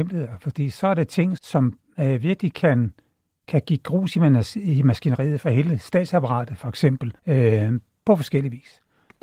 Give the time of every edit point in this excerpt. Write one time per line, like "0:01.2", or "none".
0:01.4
0:07.2